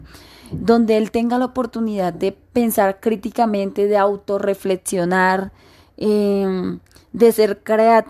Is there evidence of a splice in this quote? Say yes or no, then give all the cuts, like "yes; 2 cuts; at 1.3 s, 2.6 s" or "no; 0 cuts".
no; 0 cuts